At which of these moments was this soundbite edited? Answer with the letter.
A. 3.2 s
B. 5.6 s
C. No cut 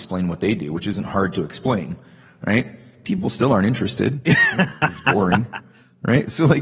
C